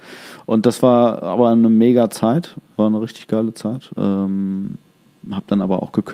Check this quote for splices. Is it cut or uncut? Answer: cut